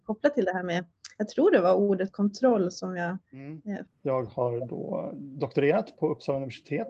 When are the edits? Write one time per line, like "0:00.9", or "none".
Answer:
0:03.9